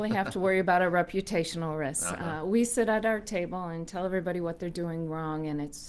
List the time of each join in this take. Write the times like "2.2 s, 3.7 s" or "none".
none